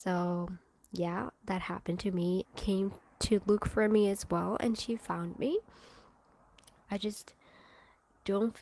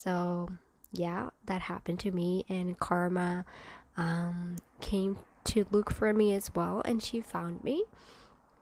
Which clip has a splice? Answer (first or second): first